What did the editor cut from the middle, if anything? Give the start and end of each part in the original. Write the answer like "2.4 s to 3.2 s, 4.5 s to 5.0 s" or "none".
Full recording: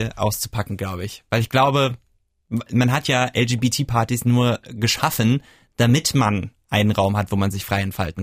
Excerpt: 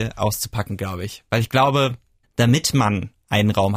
2.2 s to 5.6 s

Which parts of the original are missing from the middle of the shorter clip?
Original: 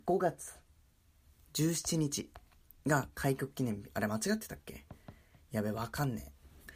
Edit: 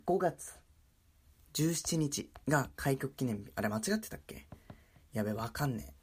2.4 s to 2.8 s

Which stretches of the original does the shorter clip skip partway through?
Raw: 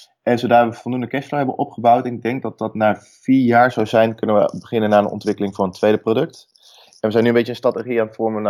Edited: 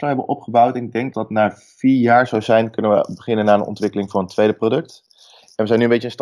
2.4 s to 2.6 s

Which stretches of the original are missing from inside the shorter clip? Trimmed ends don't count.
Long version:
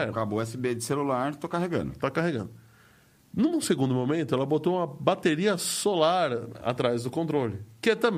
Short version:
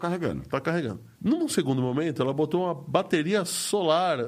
2.6 s to 3.3 s

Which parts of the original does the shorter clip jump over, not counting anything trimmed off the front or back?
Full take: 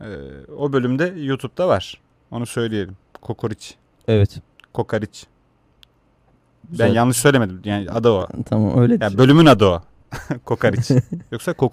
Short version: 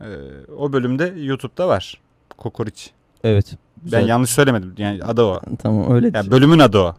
2.3 s to 3.1 s, 4.5 s to 6.5 s

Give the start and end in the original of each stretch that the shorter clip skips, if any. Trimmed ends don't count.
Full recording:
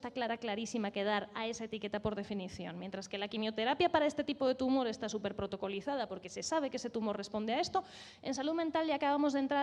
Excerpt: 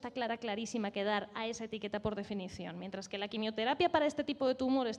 none

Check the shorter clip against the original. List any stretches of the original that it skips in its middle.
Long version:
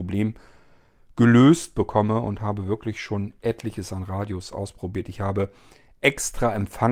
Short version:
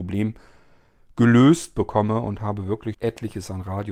2.9 s to 3.4 s

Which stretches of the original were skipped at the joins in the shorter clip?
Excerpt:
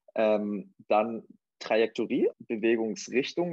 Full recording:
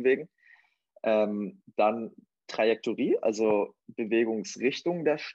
3.2 s to 3.8 s

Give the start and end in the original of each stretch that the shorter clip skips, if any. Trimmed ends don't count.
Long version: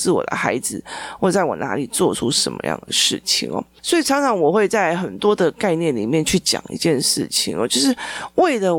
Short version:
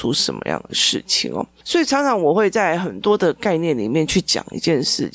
none

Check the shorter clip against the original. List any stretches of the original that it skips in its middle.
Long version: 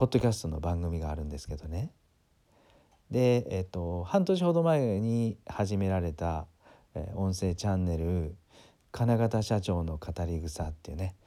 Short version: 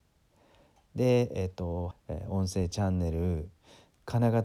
4.1 s to 6.8 s

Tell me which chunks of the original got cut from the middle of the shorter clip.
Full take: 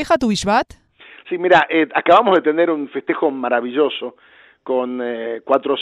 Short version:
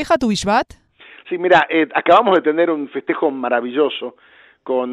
none

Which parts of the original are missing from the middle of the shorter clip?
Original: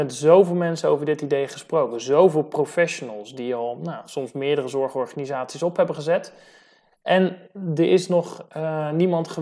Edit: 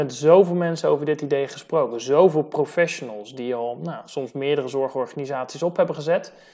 none

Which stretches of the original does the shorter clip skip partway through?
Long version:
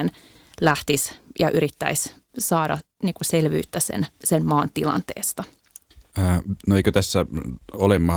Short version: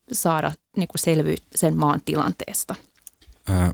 3.7 s to 4.1 s

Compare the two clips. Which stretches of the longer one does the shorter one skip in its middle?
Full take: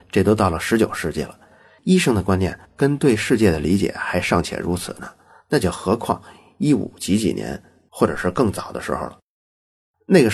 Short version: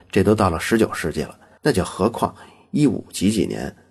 1.6 s to 5.4 s

